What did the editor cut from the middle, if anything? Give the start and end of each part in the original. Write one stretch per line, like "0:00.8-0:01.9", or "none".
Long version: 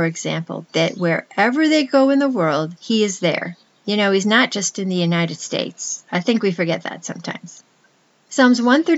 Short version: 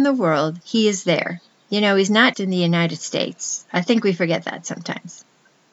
0:04.5-0:04.7